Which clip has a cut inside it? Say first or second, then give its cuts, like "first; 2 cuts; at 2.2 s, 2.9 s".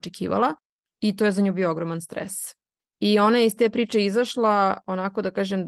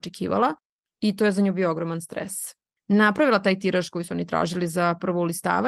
second; 1 cut; at 2.7 s